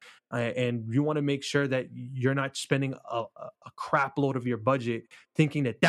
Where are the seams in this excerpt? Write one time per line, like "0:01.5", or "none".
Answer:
none

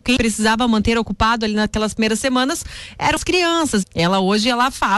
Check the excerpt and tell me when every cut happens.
0:03.8

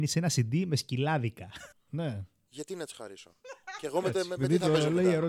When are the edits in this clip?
0:01.7
0:04.4

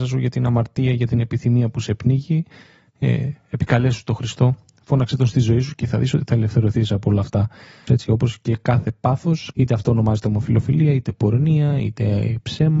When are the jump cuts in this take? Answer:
0:07.9
0:09.5

